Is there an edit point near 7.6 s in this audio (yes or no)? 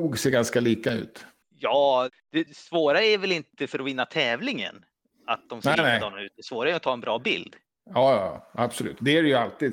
no